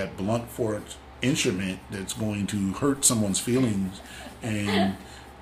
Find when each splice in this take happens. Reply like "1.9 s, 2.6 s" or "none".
none